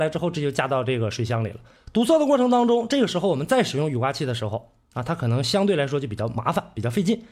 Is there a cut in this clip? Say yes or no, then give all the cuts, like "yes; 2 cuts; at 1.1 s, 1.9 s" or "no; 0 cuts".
yes; 1 cut; at 1.8 s